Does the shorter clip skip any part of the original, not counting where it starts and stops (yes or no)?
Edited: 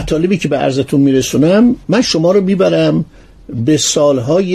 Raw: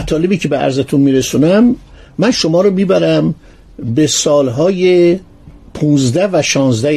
yes